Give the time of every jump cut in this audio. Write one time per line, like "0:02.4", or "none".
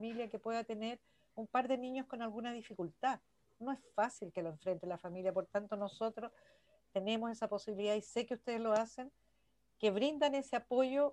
none